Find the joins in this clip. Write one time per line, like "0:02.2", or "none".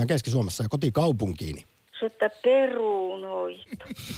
0:01.9